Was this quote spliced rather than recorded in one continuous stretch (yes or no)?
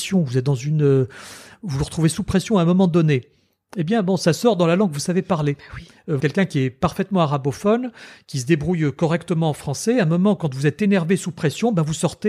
yes